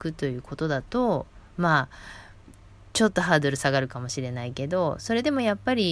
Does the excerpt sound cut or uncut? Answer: uncut